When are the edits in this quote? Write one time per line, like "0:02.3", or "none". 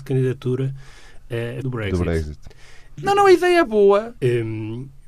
0:01.6
0:03.0
0:04.2

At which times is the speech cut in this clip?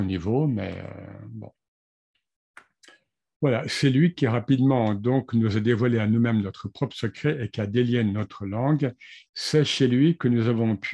0:09.3

